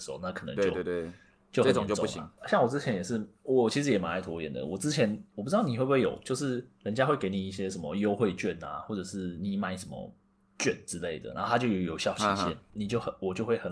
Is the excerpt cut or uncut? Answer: uncut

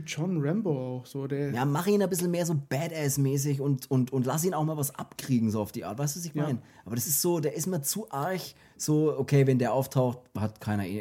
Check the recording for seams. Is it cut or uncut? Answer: uncut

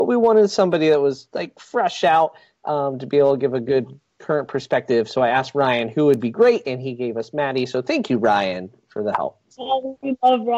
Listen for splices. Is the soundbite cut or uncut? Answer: uncut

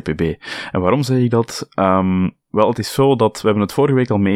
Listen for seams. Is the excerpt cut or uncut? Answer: uncut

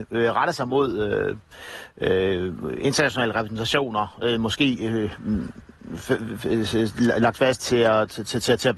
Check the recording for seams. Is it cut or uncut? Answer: uncut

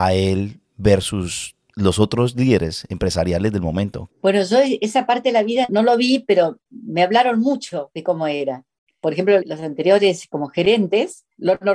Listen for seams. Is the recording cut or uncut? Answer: cut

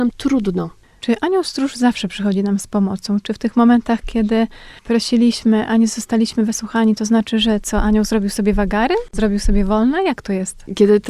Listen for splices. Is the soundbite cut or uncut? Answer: uncut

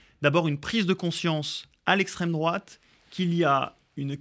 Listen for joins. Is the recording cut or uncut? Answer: uncut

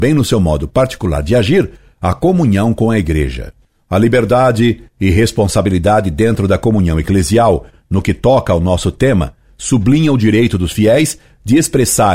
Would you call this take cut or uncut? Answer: uncut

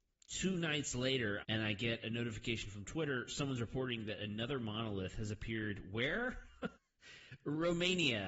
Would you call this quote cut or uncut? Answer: cut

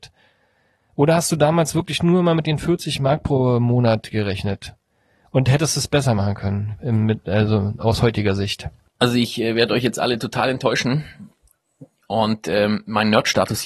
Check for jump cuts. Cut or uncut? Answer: uncut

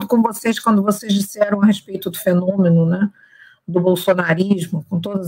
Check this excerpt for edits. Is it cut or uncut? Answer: uncut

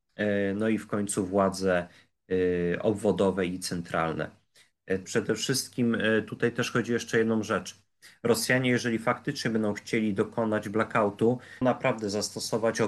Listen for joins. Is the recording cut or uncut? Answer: cut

